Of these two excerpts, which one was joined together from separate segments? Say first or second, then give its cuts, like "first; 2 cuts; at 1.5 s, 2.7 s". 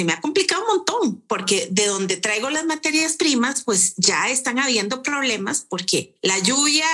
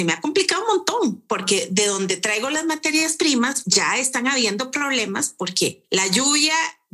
second; 1 cut; at 3.6 s